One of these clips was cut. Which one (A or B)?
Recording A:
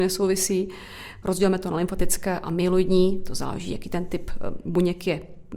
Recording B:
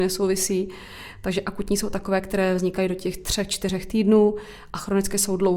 A